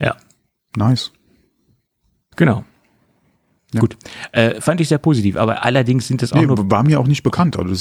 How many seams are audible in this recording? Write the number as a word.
one